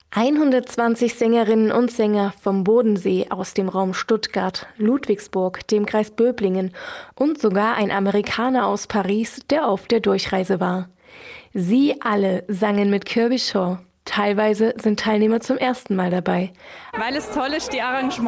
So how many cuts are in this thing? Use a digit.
2